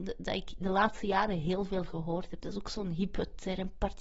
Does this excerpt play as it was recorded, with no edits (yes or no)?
yes